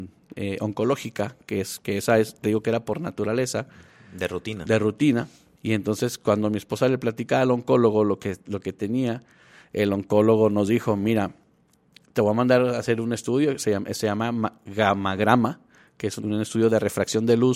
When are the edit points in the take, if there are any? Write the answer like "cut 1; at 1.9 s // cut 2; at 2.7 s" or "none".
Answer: cut 1; at 5.6 s // cut 2; at 16.2 s